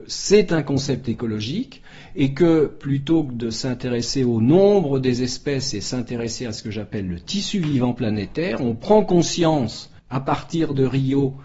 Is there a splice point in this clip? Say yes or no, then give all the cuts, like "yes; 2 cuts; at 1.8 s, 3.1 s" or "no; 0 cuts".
yes; 1 cut; at 10.0 s